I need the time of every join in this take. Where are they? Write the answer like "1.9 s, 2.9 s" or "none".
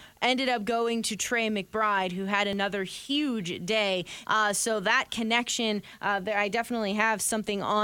4.2 s